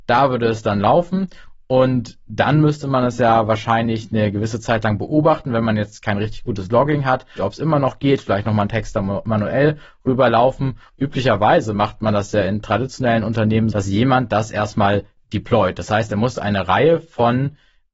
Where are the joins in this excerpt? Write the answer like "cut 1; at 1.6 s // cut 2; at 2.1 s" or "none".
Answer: cut 1; at 7.4 s // cut 2; at 10.9 s // cut 3; at 13.7 s